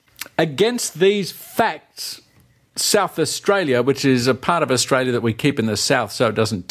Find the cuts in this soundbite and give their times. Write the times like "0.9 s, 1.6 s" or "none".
none